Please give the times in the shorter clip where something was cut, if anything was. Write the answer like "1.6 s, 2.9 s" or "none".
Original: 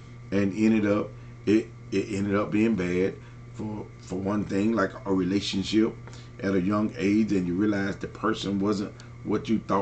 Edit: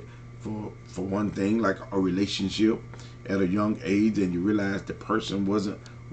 none